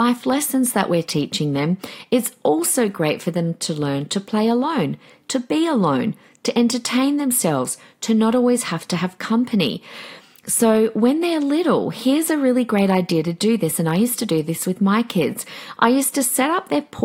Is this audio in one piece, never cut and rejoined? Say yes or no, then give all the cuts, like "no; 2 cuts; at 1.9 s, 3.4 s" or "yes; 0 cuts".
yes; 0 cuts